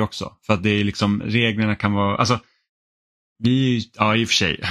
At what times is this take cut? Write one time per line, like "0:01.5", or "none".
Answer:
none